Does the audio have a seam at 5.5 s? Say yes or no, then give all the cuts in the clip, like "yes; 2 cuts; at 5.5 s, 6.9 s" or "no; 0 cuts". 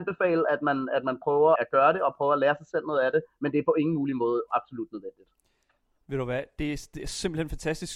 no; 1 cut; at 1.6 s